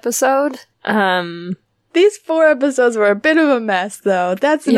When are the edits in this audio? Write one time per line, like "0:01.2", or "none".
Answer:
none

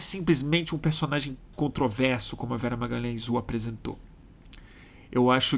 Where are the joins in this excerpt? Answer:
0:01.5

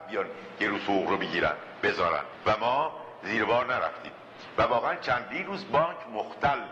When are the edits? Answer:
0:02.3

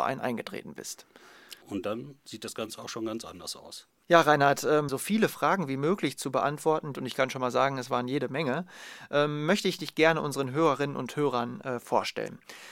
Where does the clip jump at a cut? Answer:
0:01.6
0:04.9
0:06.9

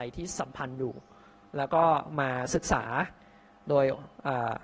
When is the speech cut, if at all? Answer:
none

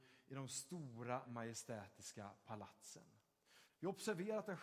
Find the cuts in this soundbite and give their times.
0:01.2
0:03.7

